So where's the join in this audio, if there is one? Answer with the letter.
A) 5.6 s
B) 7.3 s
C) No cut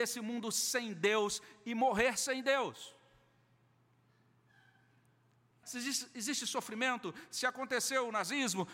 A